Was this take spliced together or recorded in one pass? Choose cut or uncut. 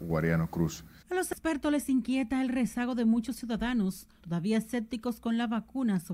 cut